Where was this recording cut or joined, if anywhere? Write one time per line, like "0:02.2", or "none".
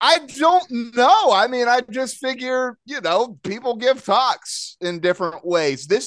none